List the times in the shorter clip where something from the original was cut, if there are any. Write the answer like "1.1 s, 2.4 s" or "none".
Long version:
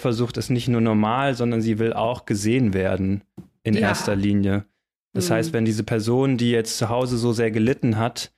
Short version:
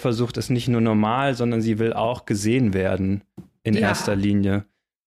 none